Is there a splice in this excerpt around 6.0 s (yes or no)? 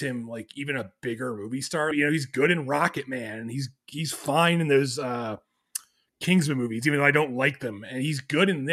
no